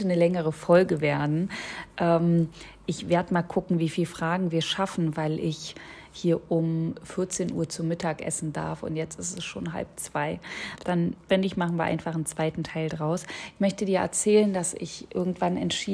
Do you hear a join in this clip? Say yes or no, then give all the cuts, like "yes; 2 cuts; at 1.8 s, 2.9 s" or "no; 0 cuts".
yes; 1 cut; at 10.8 s